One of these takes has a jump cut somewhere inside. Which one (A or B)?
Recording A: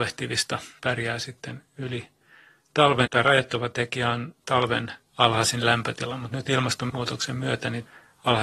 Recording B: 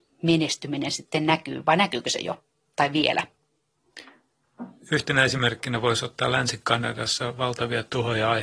A